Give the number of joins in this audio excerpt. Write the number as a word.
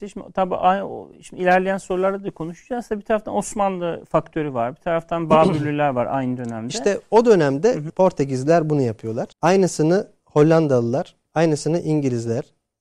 two